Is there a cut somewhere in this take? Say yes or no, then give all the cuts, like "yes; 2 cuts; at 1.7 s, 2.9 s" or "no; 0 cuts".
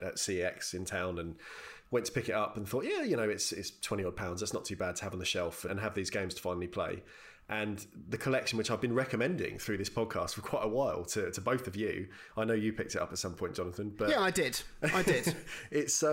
no; 0 cuts